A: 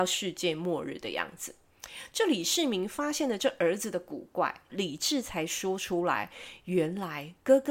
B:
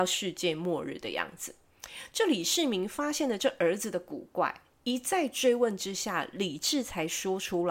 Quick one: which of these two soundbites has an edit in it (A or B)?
A